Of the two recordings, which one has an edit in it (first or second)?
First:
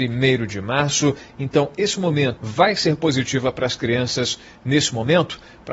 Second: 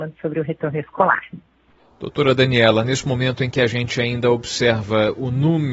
first